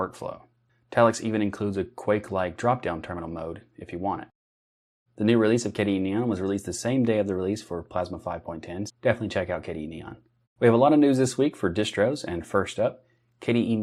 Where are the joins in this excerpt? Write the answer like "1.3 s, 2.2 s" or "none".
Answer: 5.1 s, 8.9 s, 10.4 s

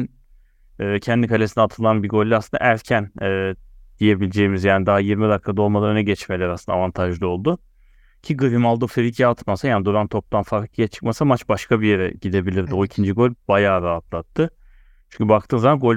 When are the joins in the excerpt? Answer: none

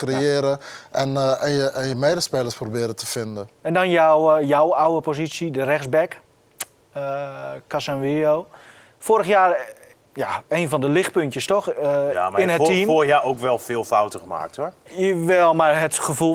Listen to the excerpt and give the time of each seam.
none

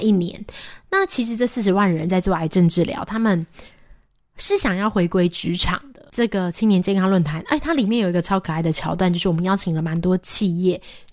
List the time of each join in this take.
6.1 s

